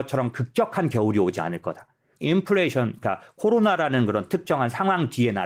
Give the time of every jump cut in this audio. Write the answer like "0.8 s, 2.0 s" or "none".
2.2 s